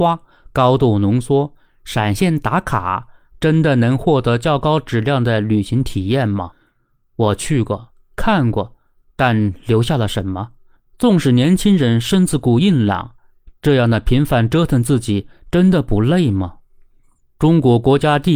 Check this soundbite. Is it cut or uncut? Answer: uncut